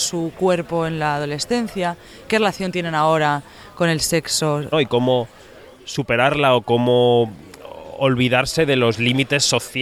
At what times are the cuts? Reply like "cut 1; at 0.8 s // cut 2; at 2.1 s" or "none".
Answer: cut 1; at 4.7 s